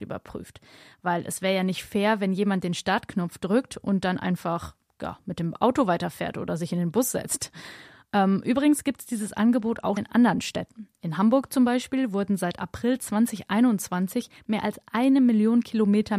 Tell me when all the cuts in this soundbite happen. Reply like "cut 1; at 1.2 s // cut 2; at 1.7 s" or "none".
cut 1; at 10.0 s